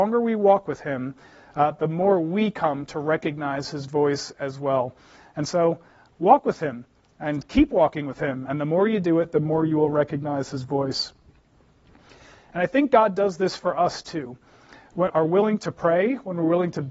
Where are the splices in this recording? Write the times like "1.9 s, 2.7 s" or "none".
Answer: 12.3 s, 15.1 s